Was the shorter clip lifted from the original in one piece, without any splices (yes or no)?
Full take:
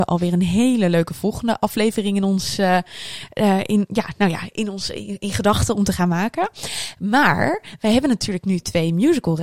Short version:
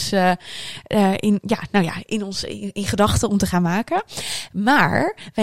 yes